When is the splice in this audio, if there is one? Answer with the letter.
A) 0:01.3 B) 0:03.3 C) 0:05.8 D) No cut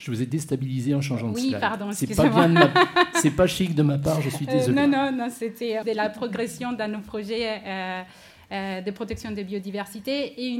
C